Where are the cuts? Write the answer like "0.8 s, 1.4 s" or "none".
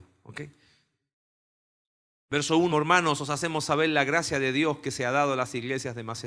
2.7 s